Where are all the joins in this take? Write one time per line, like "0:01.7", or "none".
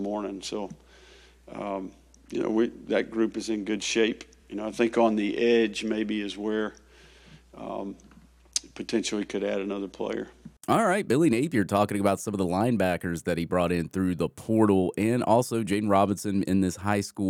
none

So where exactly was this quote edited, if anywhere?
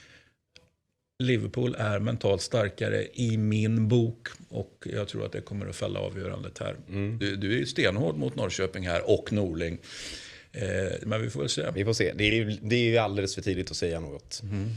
0:07.2
0:11.0

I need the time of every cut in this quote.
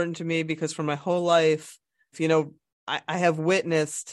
0:02.1

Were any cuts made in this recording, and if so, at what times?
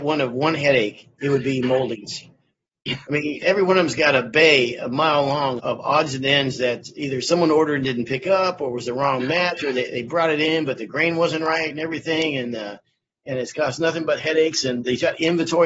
0:05.6

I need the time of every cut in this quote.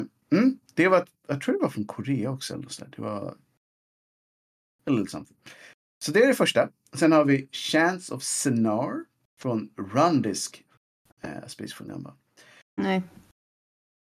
0:11.1
0:12.8

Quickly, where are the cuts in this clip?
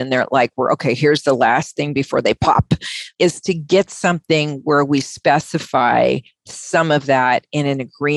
none

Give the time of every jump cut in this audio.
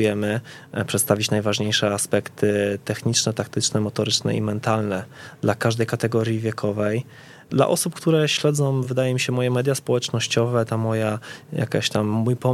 none

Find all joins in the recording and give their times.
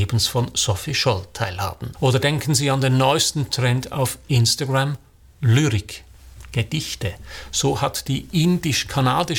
0:01.9

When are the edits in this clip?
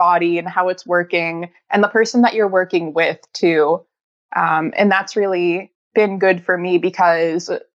0:05.8

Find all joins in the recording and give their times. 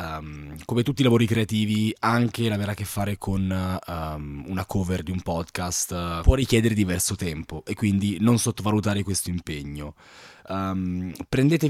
0:10.4

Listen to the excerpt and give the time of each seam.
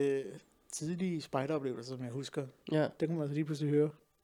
0:02.6

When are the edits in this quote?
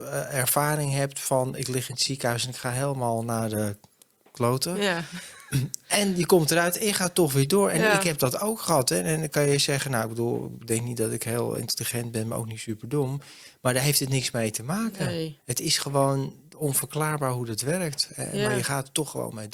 none

